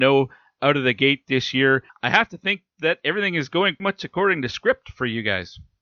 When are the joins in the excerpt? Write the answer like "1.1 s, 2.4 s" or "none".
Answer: 1.9 s, 3.8 s